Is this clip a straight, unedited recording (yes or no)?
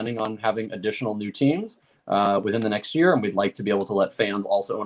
yes